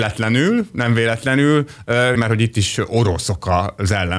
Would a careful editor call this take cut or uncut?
cut